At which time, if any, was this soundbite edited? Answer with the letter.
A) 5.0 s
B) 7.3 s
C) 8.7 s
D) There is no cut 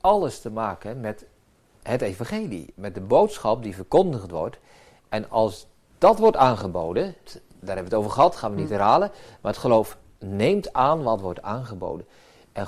B